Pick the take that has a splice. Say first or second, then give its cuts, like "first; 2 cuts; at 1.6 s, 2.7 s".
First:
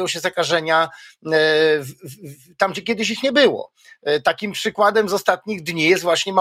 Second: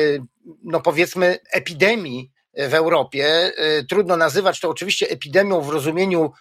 second; 1 cut; at 1.4 s